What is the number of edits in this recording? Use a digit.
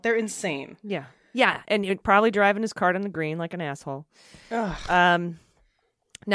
0